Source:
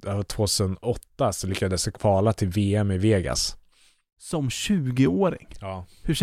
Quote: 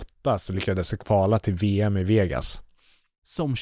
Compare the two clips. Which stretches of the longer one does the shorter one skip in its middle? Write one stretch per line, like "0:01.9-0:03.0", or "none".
none